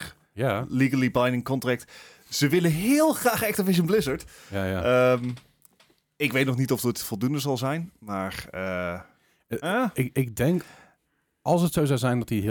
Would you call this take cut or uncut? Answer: uncut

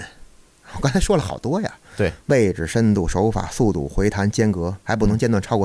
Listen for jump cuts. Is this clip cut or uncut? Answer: uncut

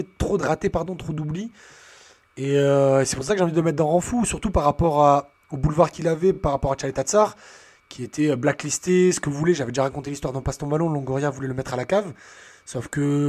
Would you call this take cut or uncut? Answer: uncut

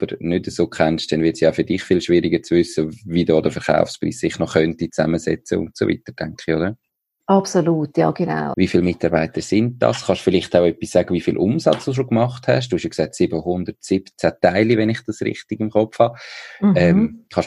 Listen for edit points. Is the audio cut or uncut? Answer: cut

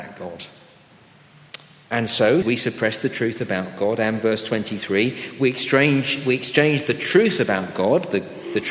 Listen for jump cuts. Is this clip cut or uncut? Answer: cut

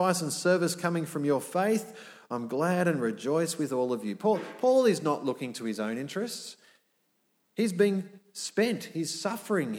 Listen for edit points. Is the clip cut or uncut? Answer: uncut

